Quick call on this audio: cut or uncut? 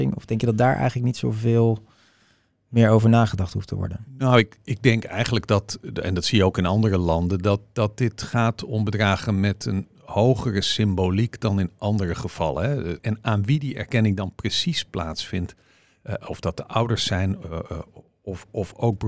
cut